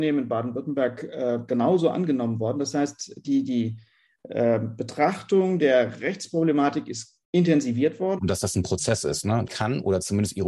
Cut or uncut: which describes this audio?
cut